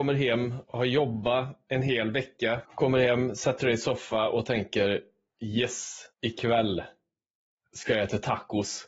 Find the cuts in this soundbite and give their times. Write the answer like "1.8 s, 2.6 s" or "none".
2.6 s, 6.1 s